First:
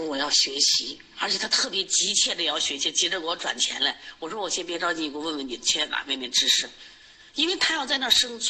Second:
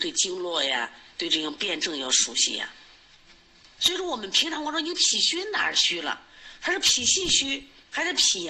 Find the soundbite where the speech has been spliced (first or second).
second